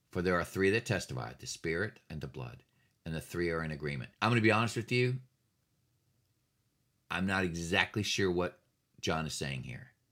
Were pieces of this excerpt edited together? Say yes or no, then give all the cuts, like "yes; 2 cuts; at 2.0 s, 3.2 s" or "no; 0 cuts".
yes; 2 cuts; at 2.1 s, 4.1 s